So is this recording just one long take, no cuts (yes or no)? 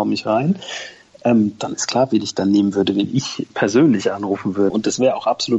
no